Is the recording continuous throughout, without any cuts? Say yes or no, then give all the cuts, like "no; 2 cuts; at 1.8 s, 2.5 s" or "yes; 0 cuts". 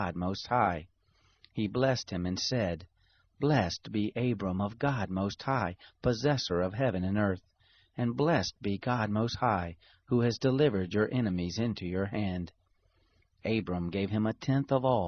yes; 0 cuts